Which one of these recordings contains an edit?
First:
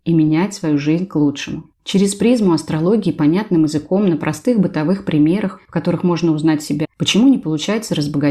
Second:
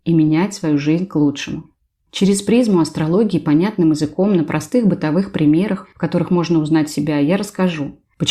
first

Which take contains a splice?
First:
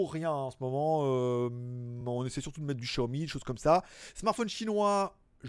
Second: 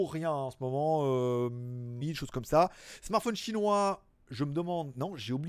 second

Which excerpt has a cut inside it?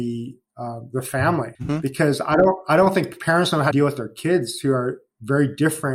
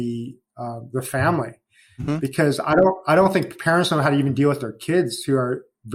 first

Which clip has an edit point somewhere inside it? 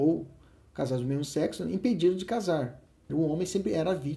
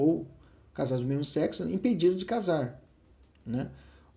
first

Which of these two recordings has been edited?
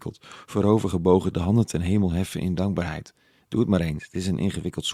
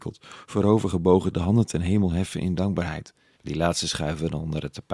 second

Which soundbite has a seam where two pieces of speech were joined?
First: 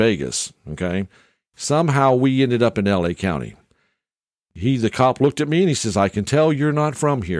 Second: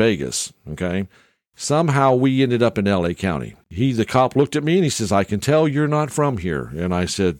second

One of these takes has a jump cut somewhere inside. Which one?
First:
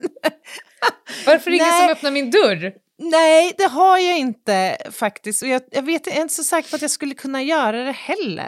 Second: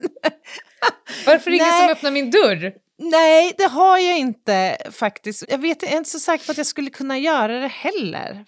second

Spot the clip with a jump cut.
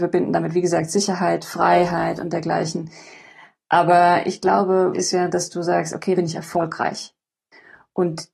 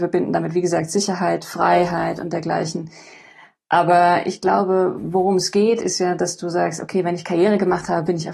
first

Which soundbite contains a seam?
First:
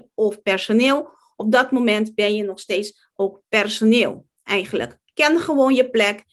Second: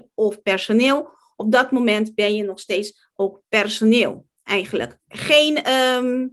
second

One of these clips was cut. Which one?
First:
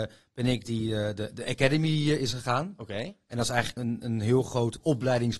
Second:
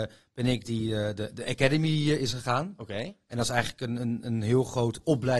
first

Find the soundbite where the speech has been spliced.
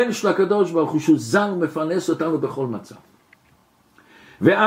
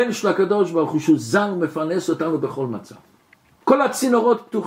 second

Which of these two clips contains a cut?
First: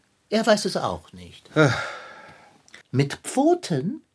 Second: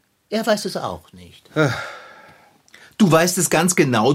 first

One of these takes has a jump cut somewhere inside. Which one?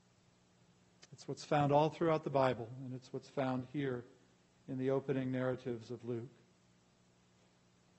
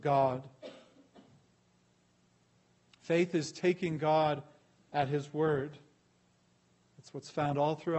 second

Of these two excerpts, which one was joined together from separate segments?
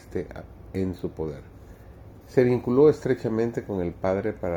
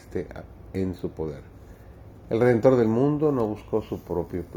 first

